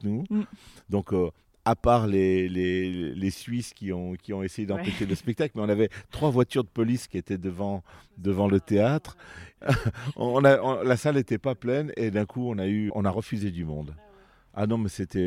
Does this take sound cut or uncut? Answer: cut